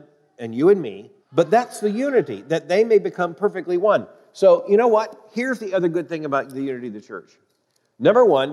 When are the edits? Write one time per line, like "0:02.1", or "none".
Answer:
0:01.2